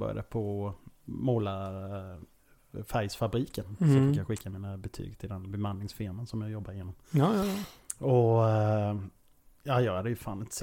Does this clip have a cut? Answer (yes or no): no